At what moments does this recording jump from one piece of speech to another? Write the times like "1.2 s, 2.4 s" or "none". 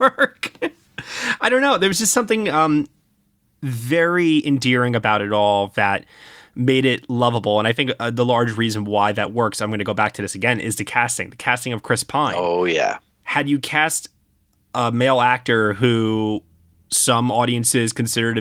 none